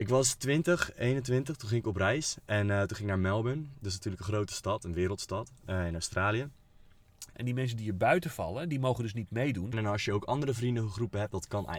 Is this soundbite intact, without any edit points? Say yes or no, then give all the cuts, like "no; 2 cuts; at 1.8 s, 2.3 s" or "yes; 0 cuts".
no; 2 cuts; at 7.3 s, 9.7 s